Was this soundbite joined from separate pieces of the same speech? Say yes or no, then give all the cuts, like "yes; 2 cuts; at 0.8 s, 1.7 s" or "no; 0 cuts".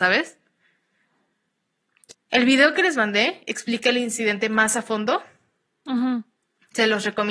yes; 1 cut; at 2.1 s